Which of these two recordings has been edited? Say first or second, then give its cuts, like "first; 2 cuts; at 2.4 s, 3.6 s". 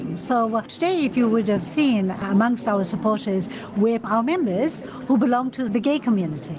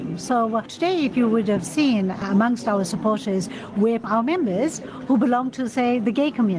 first; 1 cut; at 5.7 s